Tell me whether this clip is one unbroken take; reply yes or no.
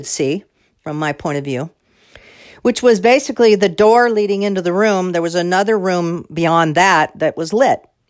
yes